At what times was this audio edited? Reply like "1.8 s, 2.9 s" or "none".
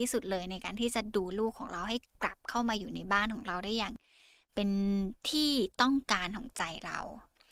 1.3 s